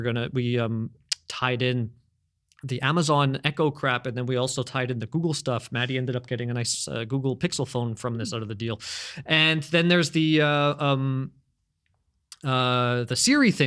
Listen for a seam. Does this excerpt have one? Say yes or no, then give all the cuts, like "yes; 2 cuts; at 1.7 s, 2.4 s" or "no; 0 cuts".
no; 0 cuts